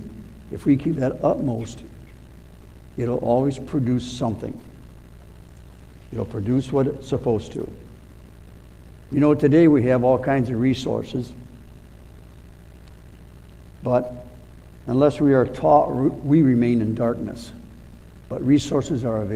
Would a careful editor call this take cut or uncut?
uncut